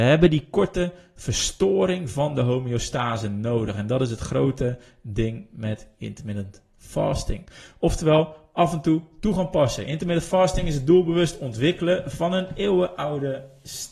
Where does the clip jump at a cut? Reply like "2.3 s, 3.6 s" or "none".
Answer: none